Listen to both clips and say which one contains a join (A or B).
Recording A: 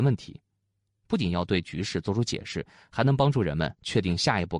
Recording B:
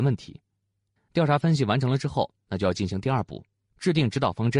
B